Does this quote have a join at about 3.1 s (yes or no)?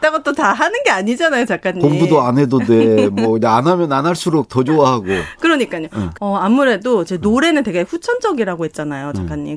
no